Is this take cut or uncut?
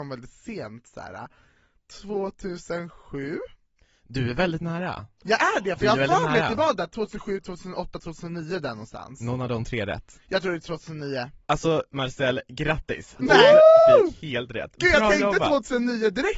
cut